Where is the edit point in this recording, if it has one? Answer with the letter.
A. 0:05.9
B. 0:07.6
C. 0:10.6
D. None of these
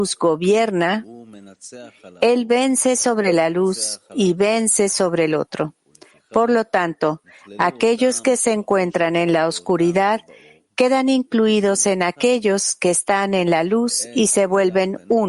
D